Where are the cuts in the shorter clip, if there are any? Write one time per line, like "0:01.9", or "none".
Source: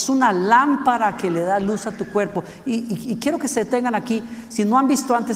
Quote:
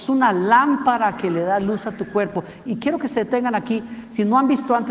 0:02.7